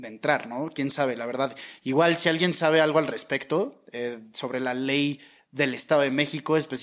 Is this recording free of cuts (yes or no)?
yes